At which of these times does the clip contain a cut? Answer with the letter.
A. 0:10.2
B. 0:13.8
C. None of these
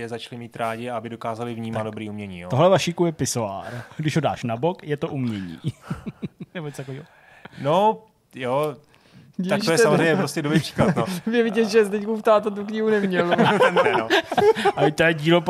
B